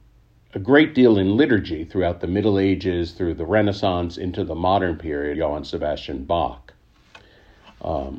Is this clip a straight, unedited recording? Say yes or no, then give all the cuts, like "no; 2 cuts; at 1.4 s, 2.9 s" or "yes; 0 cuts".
no; 1 cut; at 5.3 s